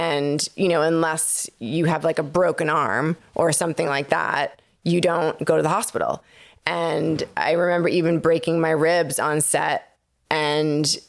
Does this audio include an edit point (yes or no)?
no